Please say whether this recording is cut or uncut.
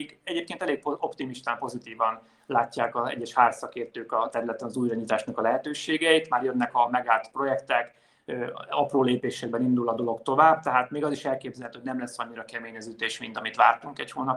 uncut